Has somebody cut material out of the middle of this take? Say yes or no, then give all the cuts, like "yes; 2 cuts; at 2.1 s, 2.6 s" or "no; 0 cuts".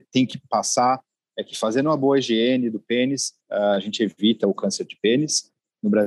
yes; 1 cut; at 3.4 s